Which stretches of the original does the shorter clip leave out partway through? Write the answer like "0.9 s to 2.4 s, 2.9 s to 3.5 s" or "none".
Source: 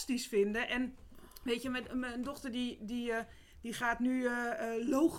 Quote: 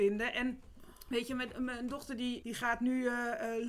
2.8 s to 3.6 s

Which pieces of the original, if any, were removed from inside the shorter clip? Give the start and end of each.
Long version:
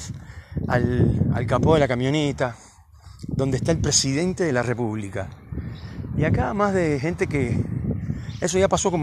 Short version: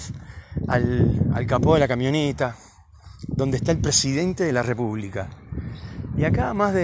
none

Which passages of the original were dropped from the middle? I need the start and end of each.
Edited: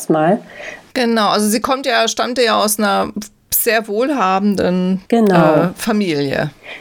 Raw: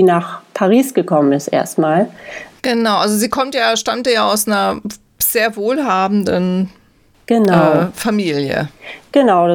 6.7 s to 7.2 s

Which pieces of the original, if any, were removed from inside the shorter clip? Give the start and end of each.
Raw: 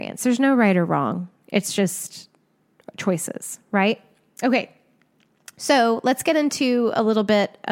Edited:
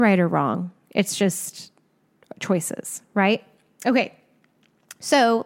none

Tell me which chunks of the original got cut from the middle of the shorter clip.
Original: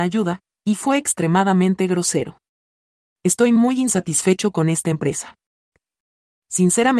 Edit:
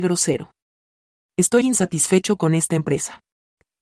3.5 s to 3.8 s

